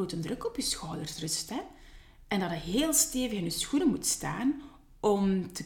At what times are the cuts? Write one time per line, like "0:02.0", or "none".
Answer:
none